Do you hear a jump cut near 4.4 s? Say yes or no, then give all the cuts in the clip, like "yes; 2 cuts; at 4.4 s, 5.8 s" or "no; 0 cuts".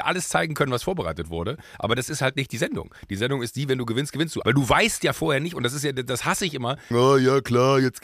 yes; 2 cuts; at 4.4 s, 6.9 s